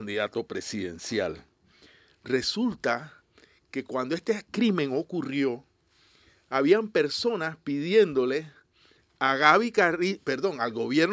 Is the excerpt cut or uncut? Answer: uncut